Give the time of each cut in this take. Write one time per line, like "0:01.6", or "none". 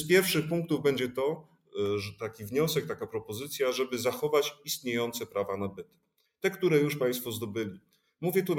none